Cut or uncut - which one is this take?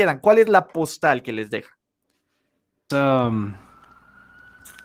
cut